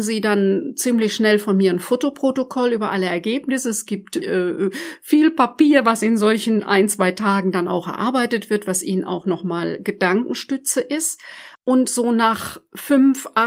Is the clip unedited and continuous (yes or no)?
no